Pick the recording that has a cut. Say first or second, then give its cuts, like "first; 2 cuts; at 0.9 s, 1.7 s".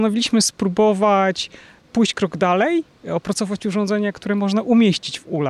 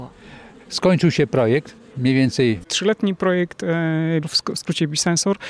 second; 2 cuts; at 2.6 s, 4.2 s